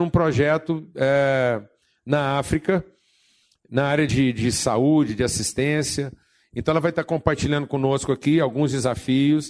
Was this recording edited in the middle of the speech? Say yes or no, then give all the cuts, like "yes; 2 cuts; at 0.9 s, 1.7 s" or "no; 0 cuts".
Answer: no; 0 cuts